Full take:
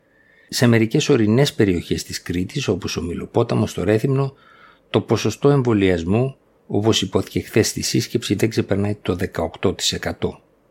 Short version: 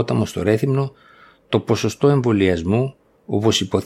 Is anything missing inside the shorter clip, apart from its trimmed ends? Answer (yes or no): no